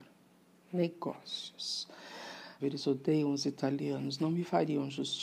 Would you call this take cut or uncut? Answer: cut